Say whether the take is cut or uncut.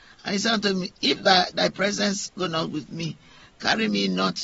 uncut